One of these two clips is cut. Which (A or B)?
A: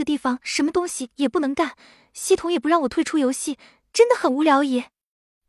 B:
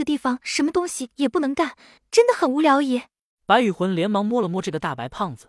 B